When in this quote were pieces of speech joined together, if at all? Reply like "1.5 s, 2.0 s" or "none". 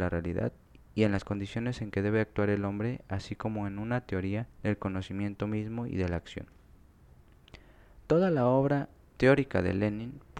4.5 s

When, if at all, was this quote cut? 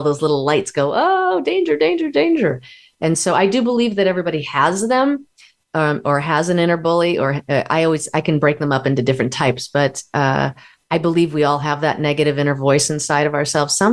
none

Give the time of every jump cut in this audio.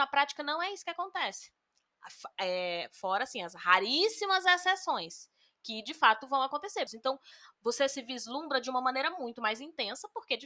6.9 s

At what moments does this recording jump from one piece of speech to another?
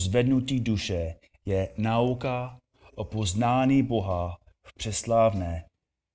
none

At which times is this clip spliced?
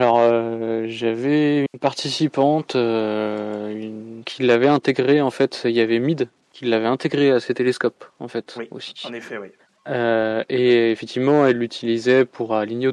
4.2 s

